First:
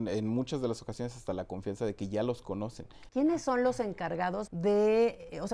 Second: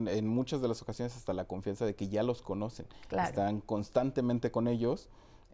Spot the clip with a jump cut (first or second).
first